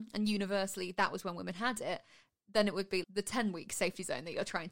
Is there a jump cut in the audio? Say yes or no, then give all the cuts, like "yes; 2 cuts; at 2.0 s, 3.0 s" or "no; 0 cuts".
yes; 1 cut; at 3.0 s